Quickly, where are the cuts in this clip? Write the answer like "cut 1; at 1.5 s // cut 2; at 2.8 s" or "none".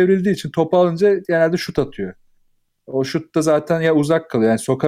none